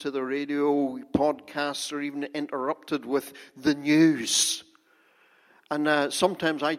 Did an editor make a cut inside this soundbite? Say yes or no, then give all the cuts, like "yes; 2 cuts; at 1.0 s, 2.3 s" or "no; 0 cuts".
no; 0 cuts